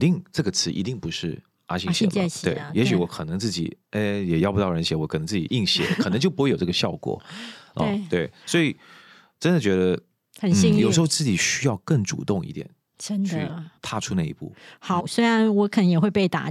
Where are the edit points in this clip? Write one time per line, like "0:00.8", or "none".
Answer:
0:13.8
0:15.0